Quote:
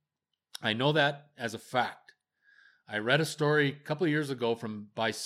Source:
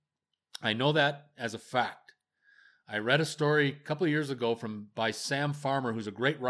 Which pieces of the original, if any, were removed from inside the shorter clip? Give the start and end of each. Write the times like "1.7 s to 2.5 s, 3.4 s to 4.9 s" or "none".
none